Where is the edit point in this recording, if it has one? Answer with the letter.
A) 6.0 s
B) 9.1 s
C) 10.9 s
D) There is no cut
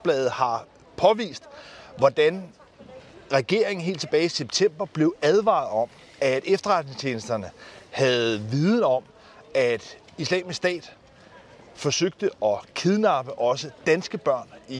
D